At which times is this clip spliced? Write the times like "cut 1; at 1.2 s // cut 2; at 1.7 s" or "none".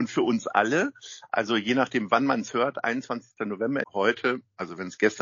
cut 1; at 3.8 s